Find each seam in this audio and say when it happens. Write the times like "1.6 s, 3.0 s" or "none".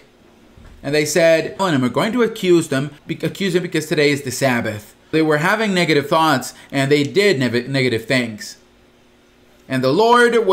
1.6 s, 3.0 s, 5.1 s